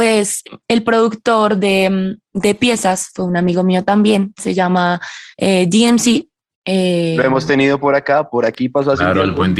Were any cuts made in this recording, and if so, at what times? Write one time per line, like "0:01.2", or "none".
0:04.4

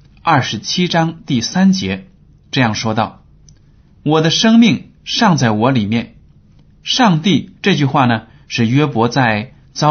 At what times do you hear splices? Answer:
0:07.6

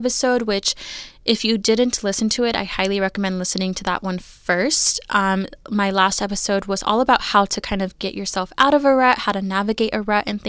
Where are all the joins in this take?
none

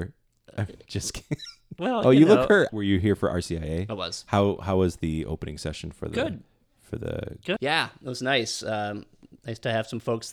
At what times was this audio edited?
0:02.7
0:07.6

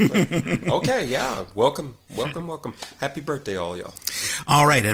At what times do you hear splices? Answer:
none

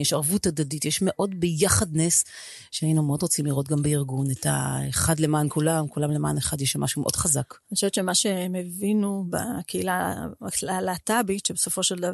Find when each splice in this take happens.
none

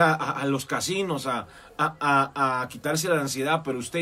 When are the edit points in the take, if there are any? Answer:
none

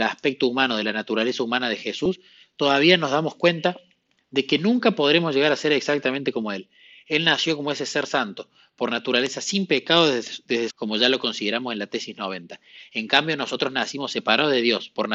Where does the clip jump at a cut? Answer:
0:10.7

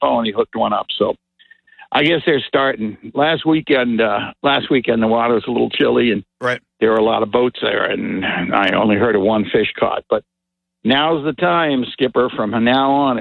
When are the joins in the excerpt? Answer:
none

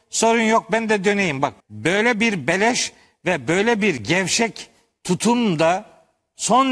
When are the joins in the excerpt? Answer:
0:01.6

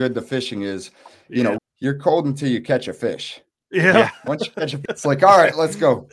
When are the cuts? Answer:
0:01.6
0:04.9

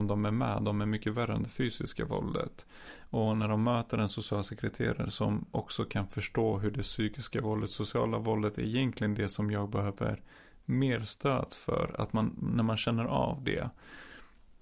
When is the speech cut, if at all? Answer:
none

